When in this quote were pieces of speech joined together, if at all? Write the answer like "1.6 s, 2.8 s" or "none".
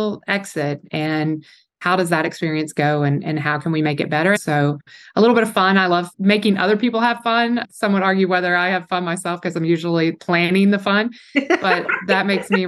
4.3 s